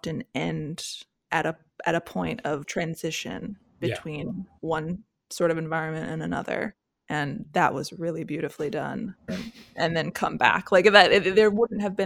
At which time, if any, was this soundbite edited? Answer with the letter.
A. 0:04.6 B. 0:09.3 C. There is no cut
B